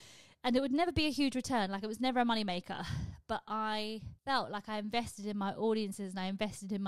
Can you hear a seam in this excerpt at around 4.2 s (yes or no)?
yes